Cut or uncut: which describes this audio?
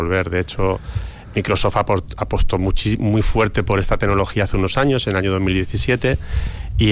uncut